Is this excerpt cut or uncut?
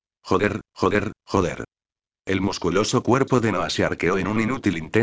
uncut